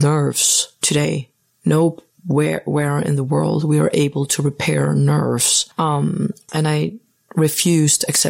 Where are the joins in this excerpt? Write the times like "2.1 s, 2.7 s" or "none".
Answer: none